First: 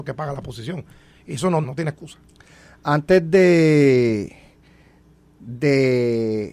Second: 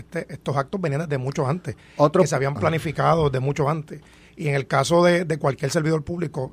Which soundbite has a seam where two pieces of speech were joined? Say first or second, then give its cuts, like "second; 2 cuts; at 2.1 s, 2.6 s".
first; 1 cut; at 1.6 s